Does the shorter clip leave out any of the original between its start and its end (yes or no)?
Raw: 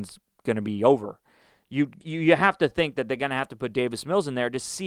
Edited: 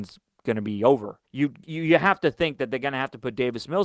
yes